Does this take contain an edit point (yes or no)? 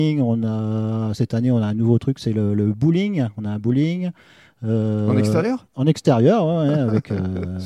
no